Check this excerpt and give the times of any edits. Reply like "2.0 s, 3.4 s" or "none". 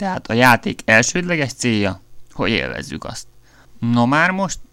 3.6 s